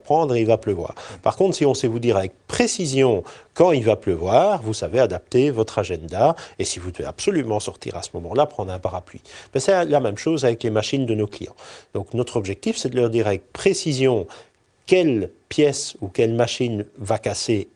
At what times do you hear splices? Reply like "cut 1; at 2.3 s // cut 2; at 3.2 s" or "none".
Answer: none

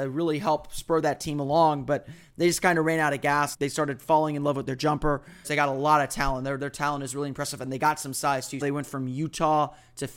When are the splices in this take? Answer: cut 1; at 3.5 s // cut 2; at 5.4 s // cut 3; at 8.6 s

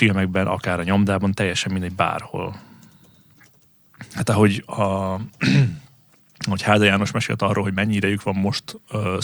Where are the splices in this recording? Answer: none

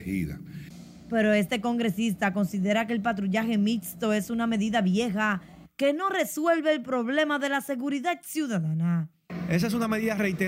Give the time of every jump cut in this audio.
none

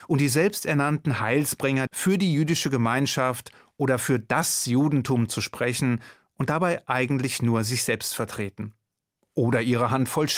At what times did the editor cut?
cut 1; at 1.9 s

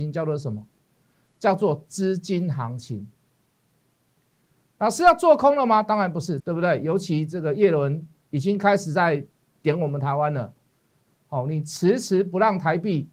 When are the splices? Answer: cut 1; at 6.4 s

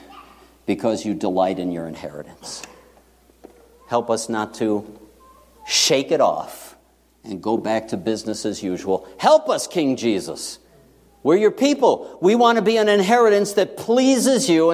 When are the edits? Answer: none

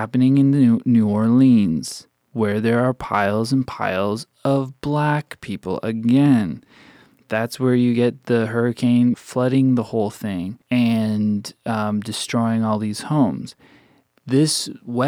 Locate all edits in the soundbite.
cut 1; at 9.1 s // cut 2; at 10.6 s

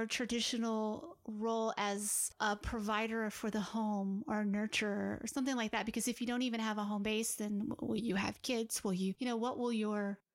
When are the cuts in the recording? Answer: none

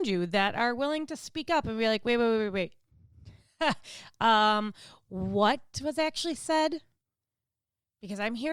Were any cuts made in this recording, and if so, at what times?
none

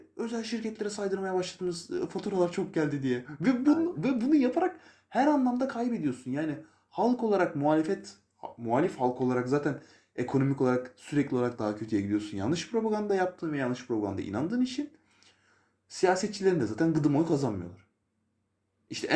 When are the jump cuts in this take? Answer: none

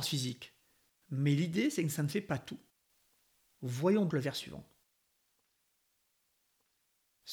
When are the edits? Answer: cut 1; at 4.1 s

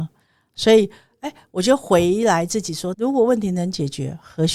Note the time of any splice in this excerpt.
cut 1; at 2.9 s

